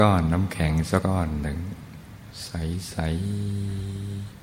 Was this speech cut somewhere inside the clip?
yes; 1 cut; at 1.0 s

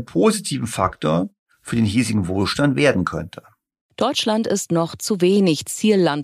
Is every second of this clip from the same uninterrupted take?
yes; 0 cuts

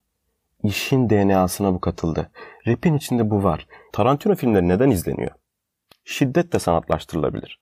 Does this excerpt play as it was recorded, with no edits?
no; 1 cut; at 3.9 s

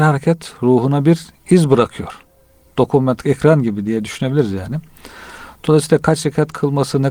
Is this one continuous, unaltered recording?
yes; 0 cuts

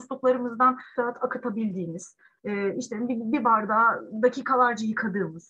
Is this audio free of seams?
no; 1 cut; at 1.0 s

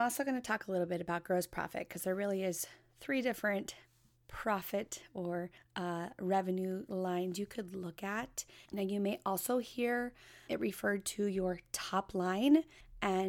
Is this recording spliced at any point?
yes; 2 cuts; at 8.6 s, 10.5 s

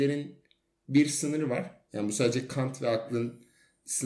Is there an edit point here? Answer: yes; 1 cut; at 1.9 s

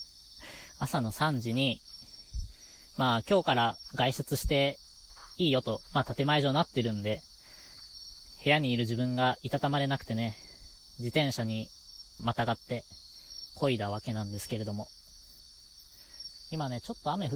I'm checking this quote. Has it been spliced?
yes; 2 cuts; at 12.2 s, 13.5 s

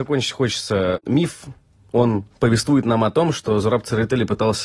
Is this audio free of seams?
no; 1 cut; at 2.3 s

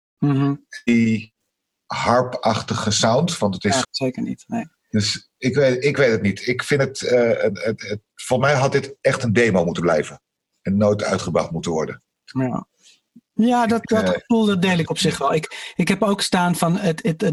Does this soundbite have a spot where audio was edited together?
yes; 1 cut; at 3.8 s

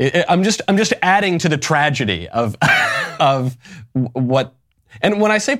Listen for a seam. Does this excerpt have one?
yes; 1 cut; at 3.2 s

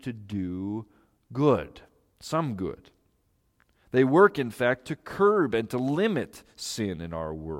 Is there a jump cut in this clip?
no; 0 cuts

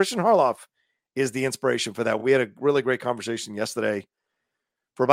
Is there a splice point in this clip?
no; 0 cuts

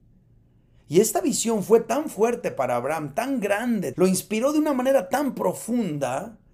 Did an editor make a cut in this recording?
yes; 1 cut; at 3.9 s

